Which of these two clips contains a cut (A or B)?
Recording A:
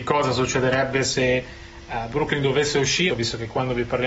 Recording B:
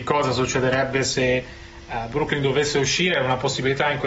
A